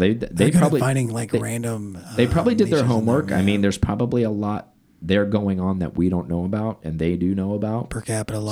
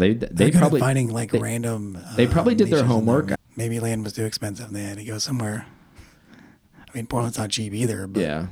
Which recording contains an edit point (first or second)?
second